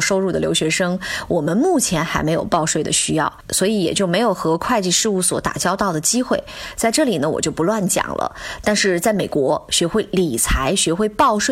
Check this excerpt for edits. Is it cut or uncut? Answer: uncut